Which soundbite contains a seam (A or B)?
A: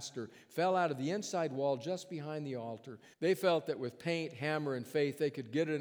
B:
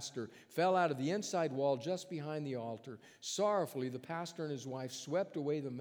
A